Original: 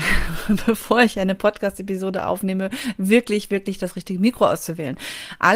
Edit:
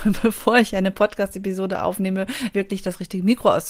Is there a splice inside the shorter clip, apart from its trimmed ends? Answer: yes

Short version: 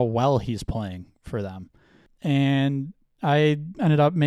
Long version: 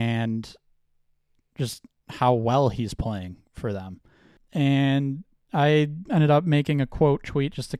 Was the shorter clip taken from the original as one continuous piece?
yes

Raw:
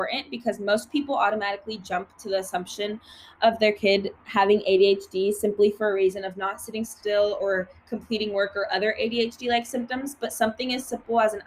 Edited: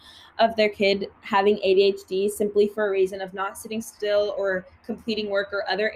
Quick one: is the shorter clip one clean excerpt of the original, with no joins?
yes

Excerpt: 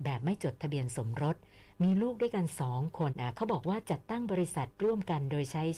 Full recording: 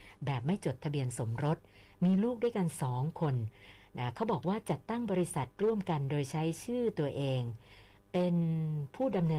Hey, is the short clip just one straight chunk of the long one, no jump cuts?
no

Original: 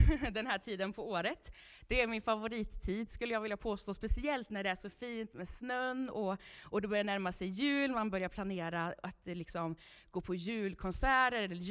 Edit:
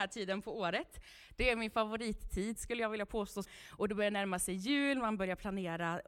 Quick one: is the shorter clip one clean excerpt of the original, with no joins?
no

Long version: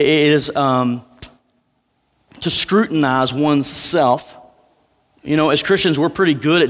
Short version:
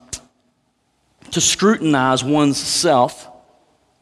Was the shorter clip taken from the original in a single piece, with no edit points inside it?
yes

